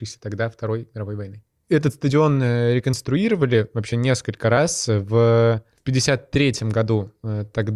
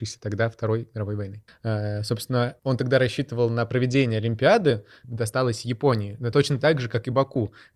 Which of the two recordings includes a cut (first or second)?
second